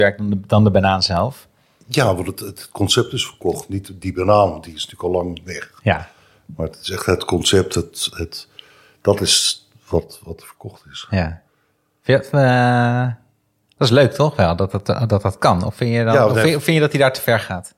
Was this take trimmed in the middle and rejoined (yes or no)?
no